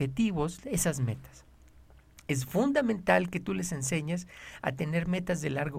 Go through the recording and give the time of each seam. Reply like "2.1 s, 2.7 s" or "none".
none